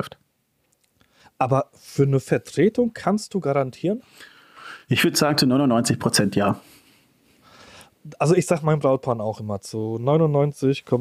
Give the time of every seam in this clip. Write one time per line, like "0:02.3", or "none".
none